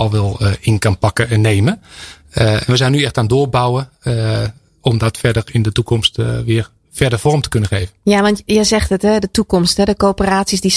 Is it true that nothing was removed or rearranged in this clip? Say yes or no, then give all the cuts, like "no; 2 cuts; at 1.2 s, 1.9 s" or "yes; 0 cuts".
yes; 0 cuts